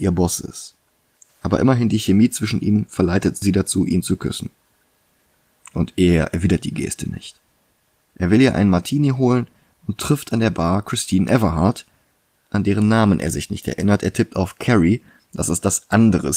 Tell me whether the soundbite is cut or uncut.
uncut